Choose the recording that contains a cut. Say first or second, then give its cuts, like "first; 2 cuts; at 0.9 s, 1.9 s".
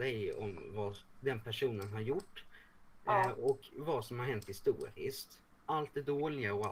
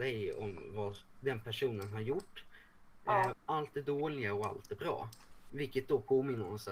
second; 2 cuts; at 3.3 s, 5.5 s